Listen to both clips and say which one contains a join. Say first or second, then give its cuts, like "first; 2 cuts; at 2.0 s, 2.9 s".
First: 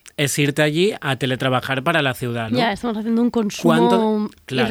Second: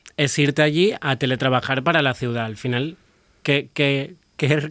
first; 1 cut; at 2.5 s